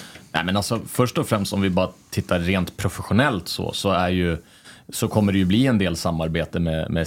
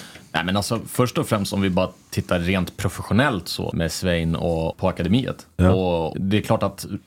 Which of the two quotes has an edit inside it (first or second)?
second